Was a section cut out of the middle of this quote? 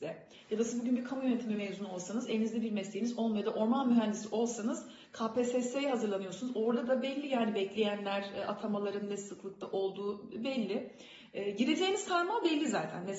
no; 0 cuts

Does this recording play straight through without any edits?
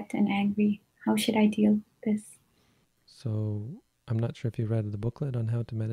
no; 1 cut; at 2.8 s

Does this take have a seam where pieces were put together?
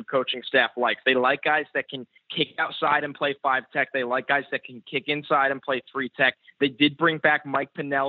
no; 0 cuts

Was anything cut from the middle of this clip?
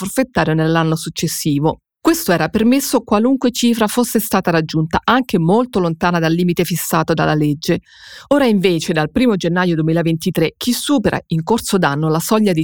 no; 0 cuts

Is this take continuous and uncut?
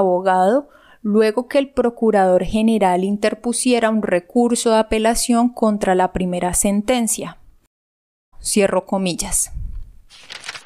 no; 1 cut; at 8.3 s

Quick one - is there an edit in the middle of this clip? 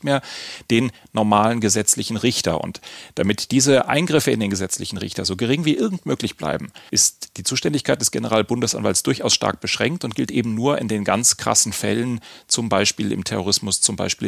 no; 0 cuts

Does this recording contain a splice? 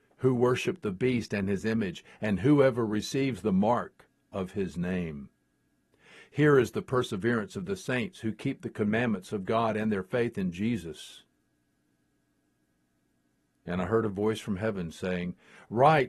no; 0 cuts

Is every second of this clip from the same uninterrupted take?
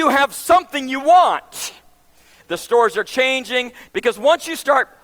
no; 2 cuts; at 2.4 s, 3.9 s

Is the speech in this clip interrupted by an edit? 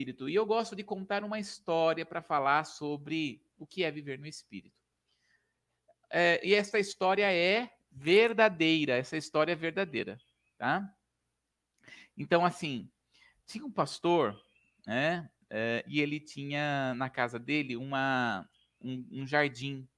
no; 0 cuts

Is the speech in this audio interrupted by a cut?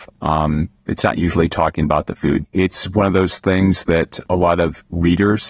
yes; 1 cut; at 2.4 s

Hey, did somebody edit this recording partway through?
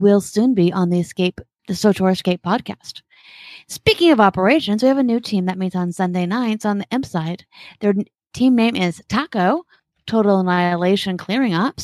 yes; 1 cut; at 1.6 s

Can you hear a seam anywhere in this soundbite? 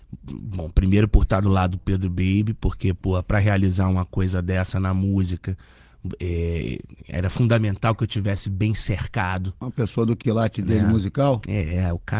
no; 0 cuts

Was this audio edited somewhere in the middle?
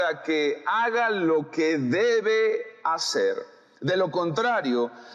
no; 0 cuts

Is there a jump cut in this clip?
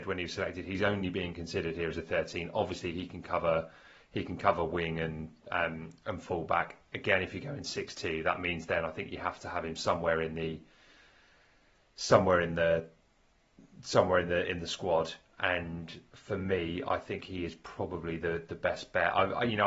no; 0 cuts

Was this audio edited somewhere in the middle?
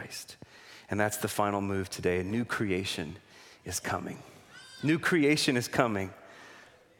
no; 0 cuts

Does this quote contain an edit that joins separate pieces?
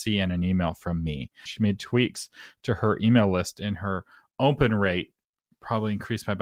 yes; 1 cut; at 1.5 s

